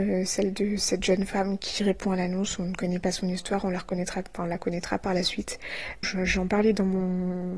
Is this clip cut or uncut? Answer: cut